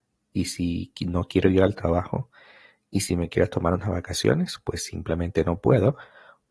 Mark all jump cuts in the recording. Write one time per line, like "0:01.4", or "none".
none